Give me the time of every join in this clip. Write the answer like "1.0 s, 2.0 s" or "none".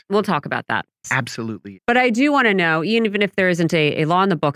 1.0 s